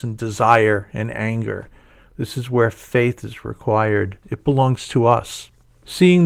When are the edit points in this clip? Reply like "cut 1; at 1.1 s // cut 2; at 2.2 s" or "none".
cut 1; at 4.2 s